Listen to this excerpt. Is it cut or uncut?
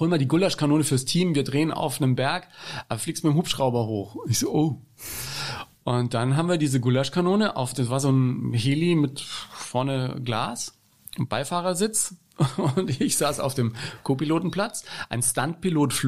uncut